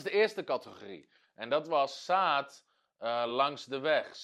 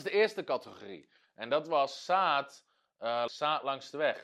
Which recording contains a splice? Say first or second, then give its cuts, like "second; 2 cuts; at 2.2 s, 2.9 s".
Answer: second; 1 cut; at 3.3 s